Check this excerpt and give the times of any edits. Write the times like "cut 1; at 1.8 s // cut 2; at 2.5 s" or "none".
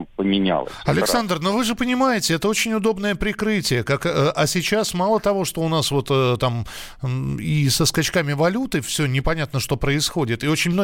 none